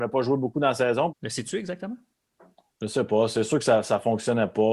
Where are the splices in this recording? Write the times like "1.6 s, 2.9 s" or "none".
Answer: 1.1 s